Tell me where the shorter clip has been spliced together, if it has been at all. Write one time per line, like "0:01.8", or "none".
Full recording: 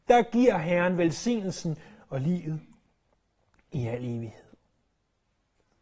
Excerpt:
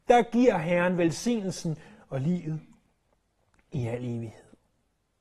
none

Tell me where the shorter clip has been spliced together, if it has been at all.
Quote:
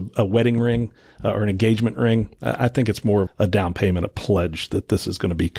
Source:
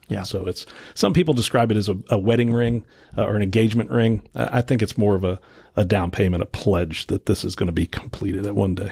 0:03.3

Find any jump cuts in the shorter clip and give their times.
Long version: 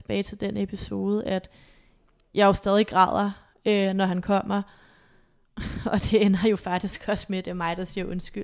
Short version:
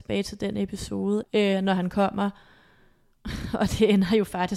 0:01.2

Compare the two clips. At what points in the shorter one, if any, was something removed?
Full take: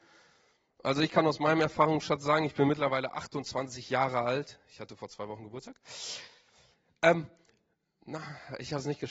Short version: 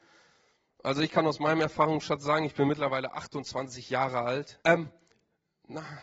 0:04.6

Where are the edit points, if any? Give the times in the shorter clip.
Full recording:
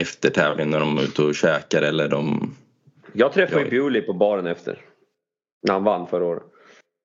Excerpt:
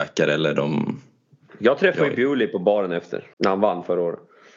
0:03.3

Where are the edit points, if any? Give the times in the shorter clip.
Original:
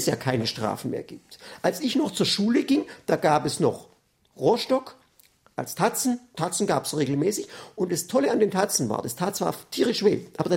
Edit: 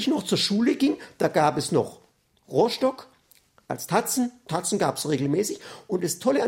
none

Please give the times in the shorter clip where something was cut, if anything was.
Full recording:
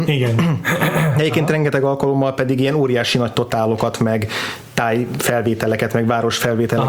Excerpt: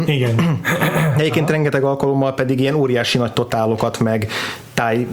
none

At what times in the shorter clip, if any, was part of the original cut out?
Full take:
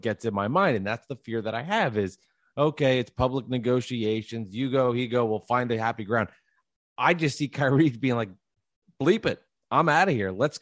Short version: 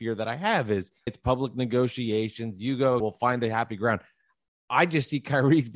0:01.1
0:03.0

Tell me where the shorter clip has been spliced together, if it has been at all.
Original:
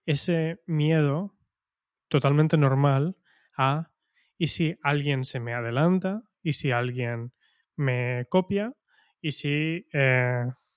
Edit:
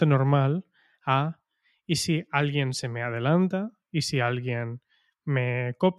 none

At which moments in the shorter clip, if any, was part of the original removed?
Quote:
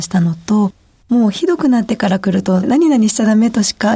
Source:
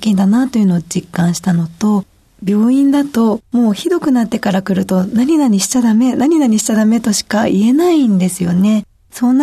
0:01.0
0:02.6

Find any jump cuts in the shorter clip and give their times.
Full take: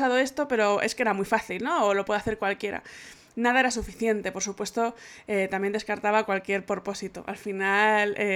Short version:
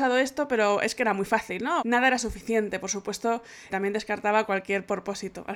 0:01.8
0:03.7

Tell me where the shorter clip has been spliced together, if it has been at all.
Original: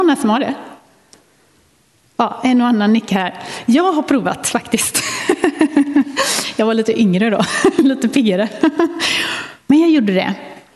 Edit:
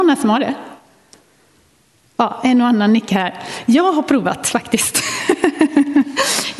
none

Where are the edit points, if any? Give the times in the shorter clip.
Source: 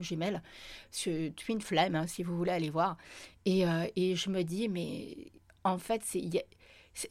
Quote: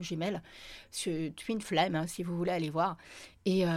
none

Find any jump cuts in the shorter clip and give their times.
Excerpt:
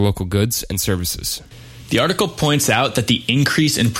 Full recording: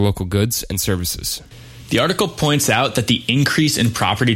none

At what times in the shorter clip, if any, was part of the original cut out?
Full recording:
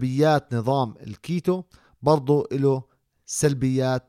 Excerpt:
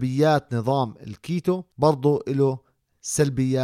0:01.7

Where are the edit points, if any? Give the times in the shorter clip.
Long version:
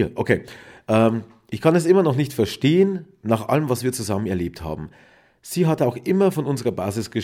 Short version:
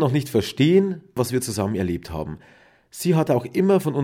0:01.2

